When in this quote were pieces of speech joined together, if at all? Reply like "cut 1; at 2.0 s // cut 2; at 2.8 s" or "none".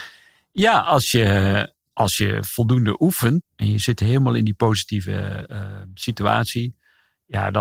cut 1; at 3.4 s